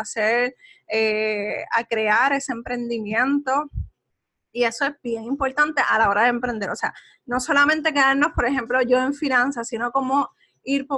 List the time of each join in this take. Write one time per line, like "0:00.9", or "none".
none